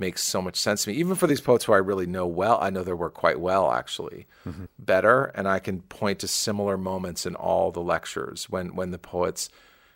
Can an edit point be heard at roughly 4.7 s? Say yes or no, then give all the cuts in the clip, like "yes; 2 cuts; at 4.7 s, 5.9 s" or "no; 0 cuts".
yes; 1 cut; at 4.7 s